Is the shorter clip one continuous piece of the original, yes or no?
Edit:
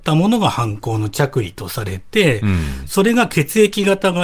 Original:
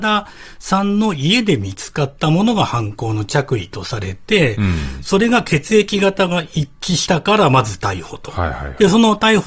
yes